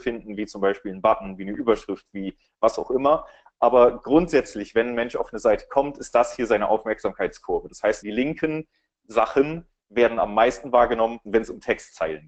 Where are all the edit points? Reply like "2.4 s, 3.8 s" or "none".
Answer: 8.0 s, 11.3 s